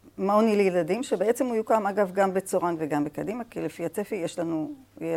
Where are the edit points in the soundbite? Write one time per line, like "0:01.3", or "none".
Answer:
none